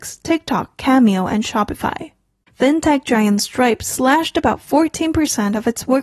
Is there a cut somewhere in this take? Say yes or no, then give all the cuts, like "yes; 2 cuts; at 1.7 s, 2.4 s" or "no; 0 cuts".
yes; 1 cut; at 2.5 s